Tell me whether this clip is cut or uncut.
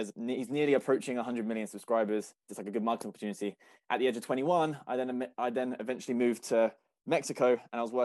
cut